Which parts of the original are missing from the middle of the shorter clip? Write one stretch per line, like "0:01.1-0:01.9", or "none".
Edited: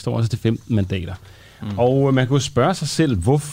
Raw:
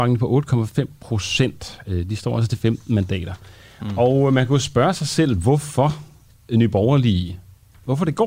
none